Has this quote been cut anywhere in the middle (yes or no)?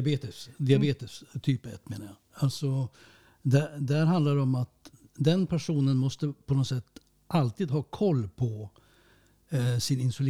no